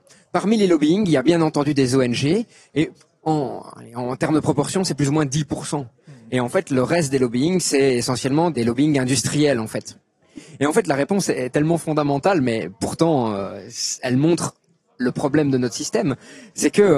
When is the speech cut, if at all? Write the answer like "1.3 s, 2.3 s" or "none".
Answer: 10.6 s